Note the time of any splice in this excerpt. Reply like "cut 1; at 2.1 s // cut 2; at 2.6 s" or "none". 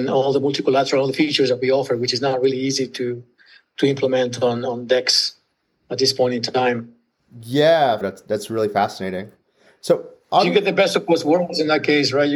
cut 1; at 8.0 s